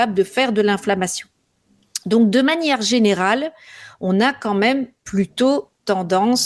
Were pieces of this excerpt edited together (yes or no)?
no